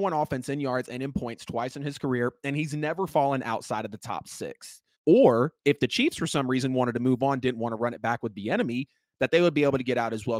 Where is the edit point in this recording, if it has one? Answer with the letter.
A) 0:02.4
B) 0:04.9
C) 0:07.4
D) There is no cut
B